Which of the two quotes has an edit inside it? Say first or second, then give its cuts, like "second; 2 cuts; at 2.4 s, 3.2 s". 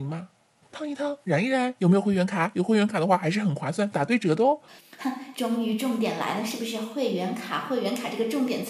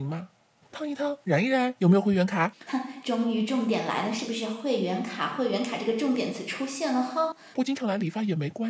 second; 2 cuts; at 2.5 s, 7.5 s